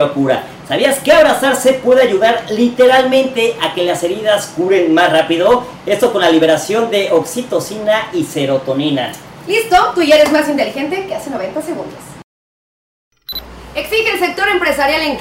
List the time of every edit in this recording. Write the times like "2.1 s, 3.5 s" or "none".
none